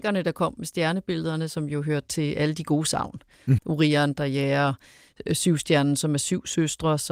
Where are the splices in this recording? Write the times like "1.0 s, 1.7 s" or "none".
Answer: 3.6 s